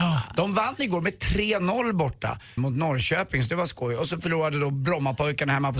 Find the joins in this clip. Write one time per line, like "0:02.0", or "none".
0:02.6

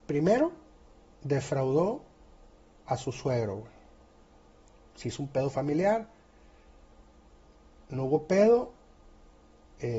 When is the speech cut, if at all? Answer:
none

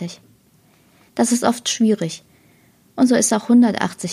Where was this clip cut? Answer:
0:01.1

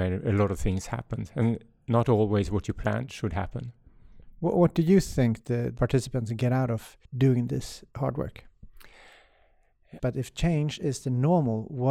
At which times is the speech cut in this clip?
0:07.1
0:10.0

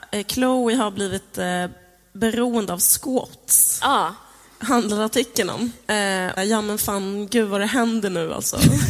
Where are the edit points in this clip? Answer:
0:06.4

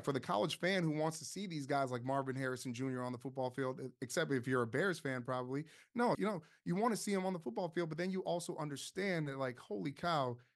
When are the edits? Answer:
0:06.1

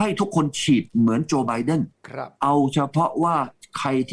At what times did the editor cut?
0:02.3

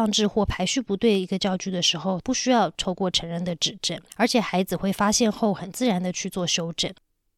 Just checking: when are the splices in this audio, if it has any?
0:02.2
0:04.1

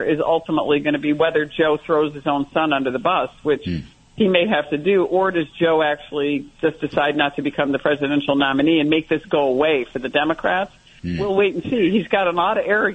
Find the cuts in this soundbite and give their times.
none

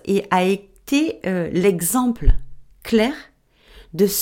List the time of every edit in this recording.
none

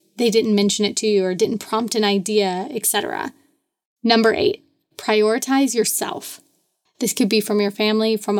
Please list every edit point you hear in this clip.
0:03.9
0:06.9

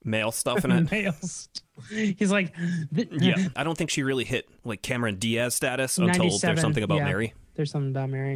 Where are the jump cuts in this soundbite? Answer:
0:01.6
0:03.5

